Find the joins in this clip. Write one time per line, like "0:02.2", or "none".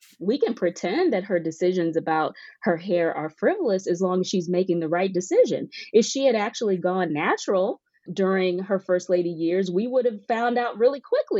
0:08.1